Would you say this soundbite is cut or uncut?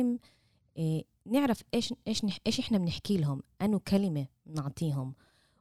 uncut